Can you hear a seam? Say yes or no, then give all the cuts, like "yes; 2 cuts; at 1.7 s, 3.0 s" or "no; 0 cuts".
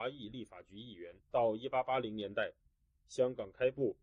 yes; 1 cut; at 1.2 s